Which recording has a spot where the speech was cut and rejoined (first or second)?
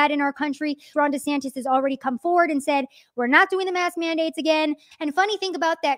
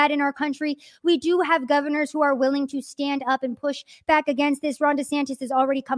first